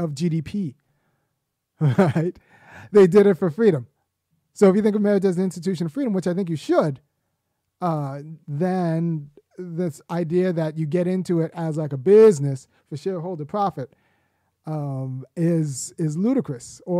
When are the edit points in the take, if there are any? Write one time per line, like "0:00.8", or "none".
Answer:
none